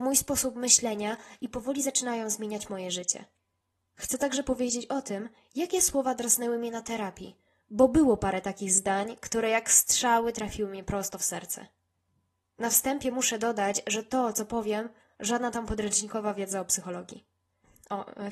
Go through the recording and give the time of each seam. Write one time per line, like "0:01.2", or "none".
0:15.1